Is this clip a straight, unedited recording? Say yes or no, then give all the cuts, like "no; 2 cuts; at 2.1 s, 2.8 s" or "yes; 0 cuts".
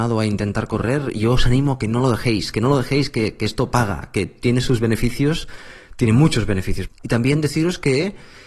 no; 1 cut; at 6.9 s